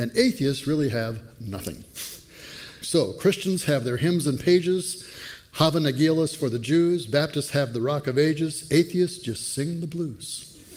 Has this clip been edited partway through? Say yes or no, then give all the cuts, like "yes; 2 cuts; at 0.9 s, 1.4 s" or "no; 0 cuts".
yes; 1 cut; at 2.8 s